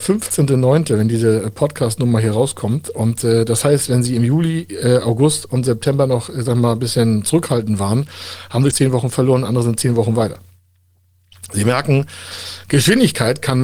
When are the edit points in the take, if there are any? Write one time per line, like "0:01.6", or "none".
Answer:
0:08.7